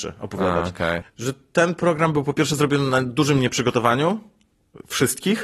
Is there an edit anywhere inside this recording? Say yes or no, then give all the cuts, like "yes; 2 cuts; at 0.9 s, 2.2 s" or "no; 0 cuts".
yes; 1 cut; at 1.0 s